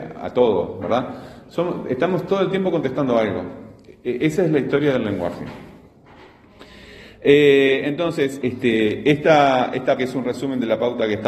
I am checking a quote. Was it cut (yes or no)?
yes